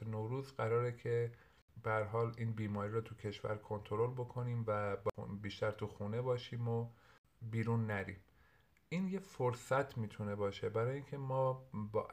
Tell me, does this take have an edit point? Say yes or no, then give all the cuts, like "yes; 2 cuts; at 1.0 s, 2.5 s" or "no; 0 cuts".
no; 0 cuts